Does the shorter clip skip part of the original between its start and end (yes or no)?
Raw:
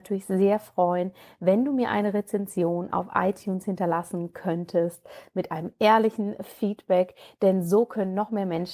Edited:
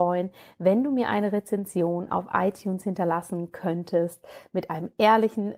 no